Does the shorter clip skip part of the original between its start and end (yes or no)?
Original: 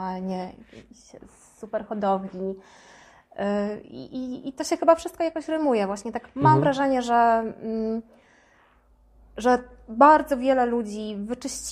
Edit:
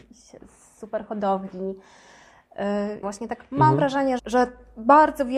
yes